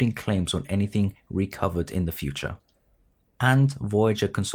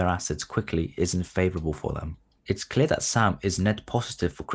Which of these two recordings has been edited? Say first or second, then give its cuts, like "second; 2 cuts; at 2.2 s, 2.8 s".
second; 1 cut; at 2.4 s